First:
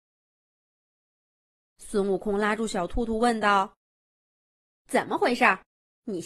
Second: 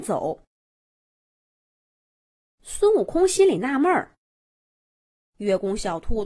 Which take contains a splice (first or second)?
second